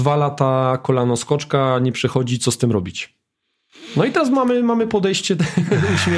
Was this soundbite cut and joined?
no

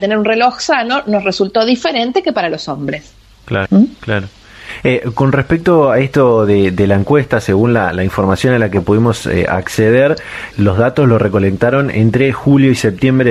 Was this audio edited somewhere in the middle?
yes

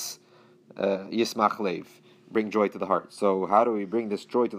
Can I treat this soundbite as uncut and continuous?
yes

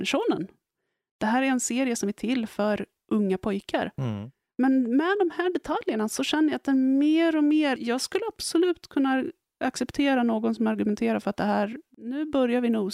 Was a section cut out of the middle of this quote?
yes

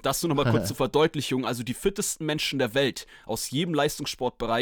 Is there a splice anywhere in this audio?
no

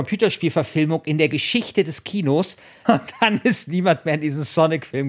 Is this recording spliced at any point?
yes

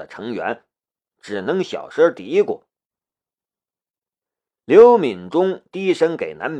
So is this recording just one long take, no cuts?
no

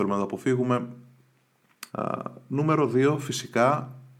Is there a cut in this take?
yes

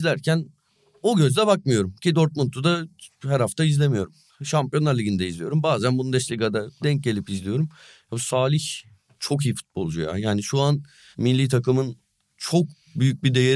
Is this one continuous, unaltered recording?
yes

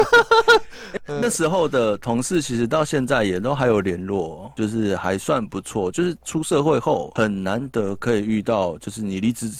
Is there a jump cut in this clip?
no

